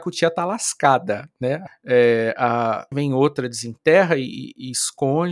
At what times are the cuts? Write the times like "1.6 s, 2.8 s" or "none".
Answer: 1.7 s, 2.9 s